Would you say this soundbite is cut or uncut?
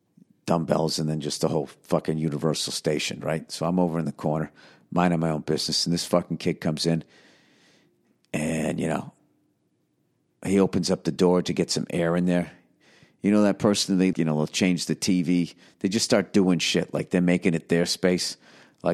cut